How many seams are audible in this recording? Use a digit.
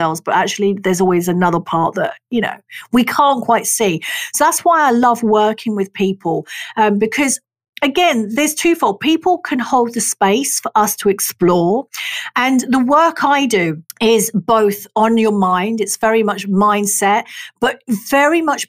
1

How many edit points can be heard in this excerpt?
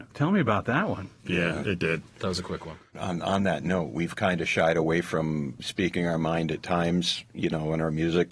1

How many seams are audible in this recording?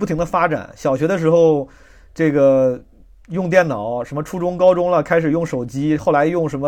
0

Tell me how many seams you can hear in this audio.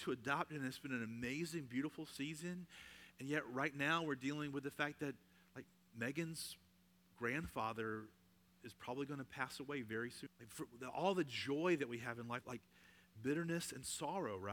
2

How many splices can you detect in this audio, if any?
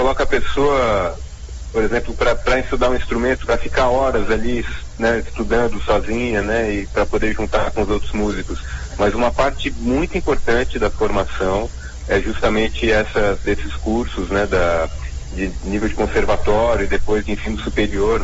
1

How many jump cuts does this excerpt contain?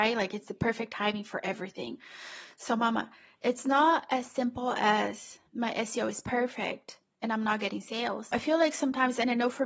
2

